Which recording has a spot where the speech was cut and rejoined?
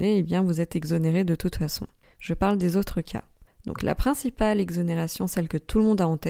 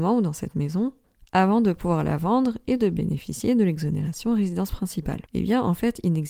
second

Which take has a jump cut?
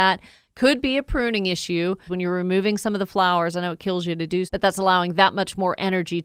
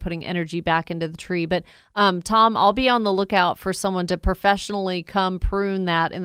first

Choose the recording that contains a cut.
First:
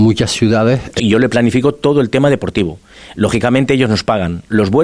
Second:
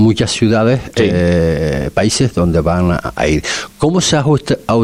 first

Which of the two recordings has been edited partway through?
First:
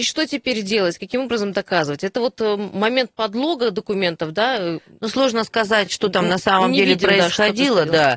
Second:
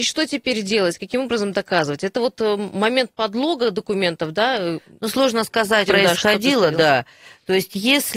second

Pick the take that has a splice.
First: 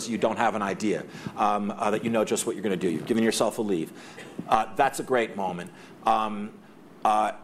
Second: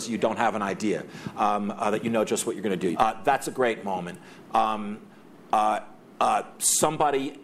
second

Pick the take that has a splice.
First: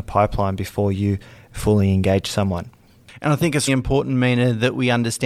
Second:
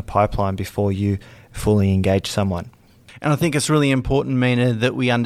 first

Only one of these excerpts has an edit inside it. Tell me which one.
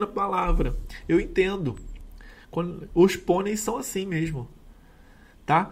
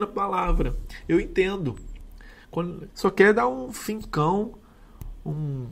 second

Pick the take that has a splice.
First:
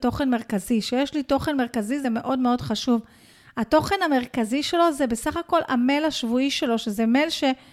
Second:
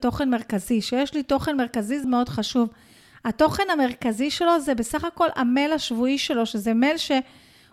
second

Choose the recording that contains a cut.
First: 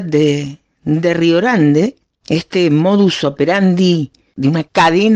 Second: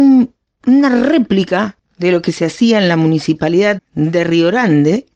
second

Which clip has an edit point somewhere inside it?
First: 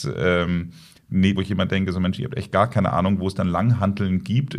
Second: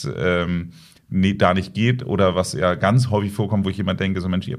first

